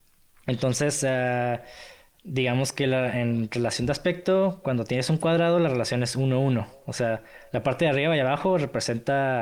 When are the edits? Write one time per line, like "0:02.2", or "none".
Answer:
none